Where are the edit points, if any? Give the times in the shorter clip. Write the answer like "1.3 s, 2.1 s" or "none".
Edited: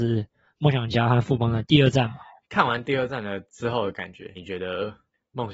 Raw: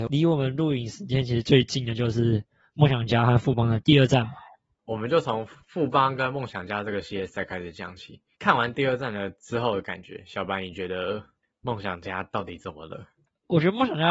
2.4 s, 4.4 s